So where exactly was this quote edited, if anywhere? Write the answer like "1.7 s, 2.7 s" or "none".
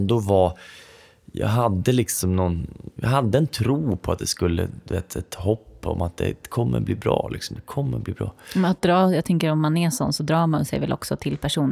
none

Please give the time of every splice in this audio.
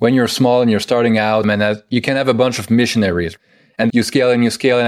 1.4 s, 3.9 s

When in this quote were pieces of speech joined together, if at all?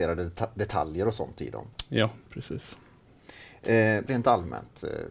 4.1 s

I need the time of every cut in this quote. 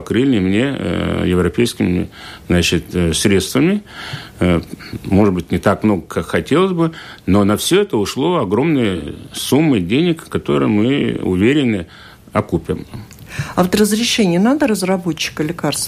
none

